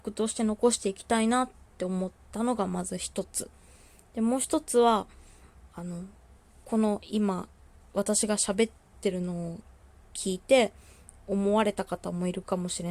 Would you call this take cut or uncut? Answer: uncut